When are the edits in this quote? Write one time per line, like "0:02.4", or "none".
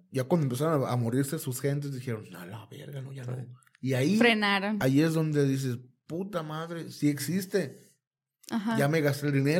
none

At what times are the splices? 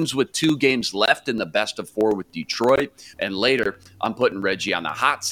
0:03.1

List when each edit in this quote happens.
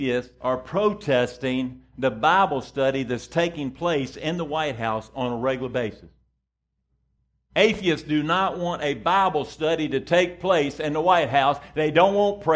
none

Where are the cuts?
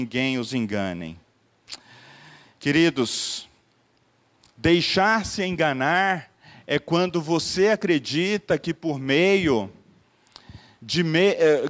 none

